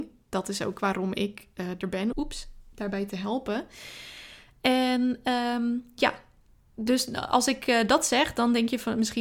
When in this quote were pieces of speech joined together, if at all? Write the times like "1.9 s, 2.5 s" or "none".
2.1 s